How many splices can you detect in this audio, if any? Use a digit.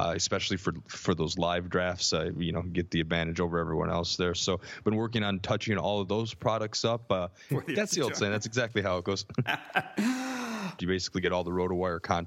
2